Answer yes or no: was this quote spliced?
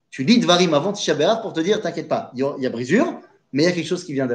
no